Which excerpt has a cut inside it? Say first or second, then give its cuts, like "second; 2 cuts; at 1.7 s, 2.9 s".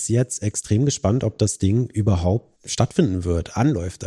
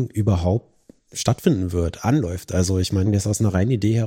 first; 1 cut; at 2.6 s